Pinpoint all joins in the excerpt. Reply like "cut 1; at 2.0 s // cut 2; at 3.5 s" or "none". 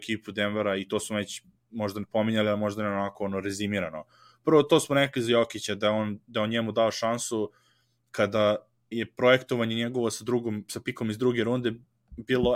cut 1; at 8.9 s